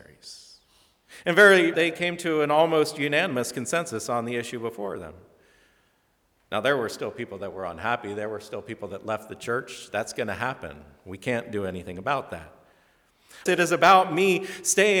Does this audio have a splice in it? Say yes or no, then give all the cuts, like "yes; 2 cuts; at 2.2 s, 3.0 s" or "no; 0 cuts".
yes; 2 cuts; at 1.7 s, 13.5 s